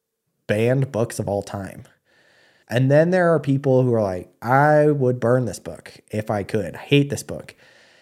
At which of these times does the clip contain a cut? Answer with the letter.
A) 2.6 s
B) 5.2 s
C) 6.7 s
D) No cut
A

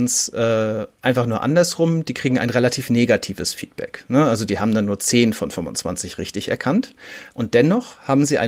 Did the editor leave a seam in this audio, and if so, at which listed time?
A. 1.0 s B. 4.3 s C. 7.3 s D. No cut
C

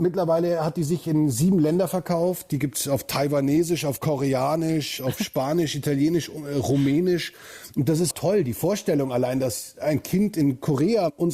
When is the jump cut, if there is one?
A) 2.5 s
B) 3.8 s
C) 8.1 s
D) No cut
C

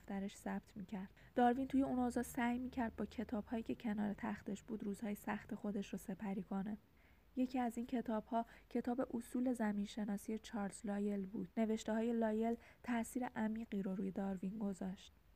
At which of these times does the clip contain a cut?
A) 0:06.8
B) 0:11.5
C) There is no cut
B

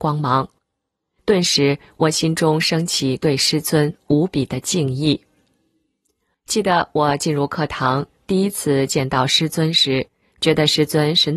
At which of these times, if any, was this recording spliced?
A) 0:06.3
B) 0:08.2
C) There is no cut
A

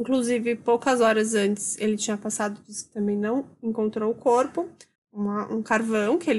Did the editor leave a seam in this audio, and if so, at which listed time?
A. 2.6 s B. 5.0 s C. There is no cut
B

